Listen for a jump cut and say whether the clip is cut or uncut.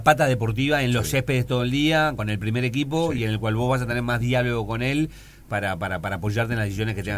uncut